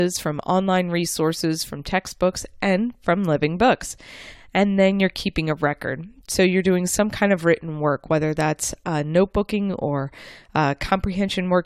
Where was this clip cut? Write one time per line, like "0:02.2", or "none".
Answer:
none